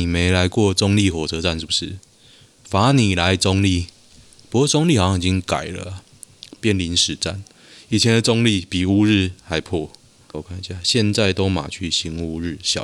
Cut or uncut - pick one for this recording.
cut